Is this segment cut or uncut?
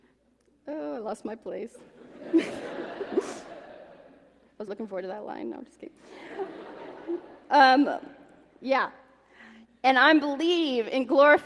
cut